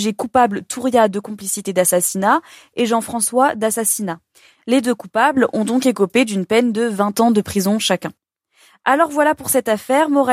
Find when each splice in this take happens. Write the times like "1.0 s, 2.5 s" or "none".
4.5 s